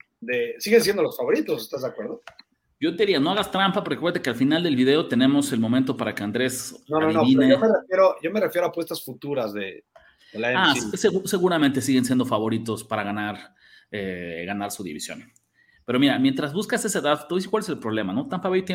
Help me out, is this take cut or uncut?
uncut